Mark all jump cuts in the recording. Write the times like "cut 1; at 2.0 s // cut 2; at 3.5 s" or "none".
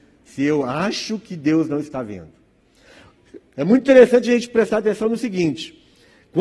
none